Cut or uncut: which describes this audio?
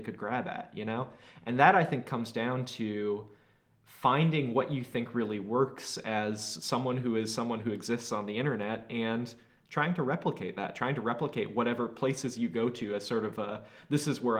uncut